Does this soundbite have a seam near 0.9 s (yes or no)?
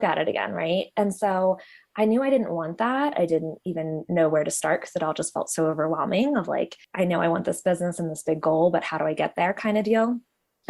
no